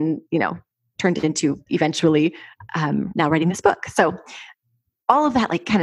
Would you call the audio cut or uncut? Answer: cut